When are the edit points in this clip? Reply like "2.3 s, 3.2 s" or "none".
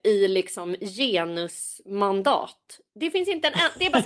none